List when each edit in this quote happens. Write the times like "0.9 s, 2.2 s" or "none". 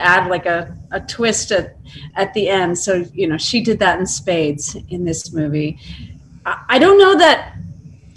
2.1 s